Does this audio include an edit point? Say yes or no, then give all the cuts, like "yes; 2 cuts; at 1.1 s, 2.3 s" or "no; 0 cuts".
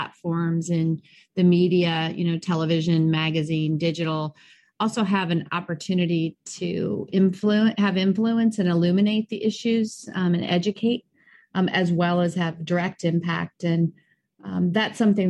no; 0 cuts